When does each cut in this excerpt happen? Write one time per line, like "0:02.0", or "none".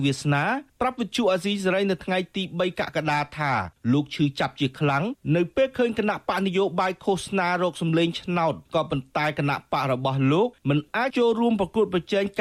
0:11.1